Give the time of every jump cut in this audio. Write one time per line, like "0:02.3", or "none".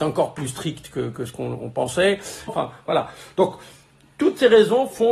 0:02.5